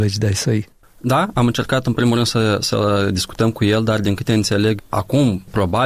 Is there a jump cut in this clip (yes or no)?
no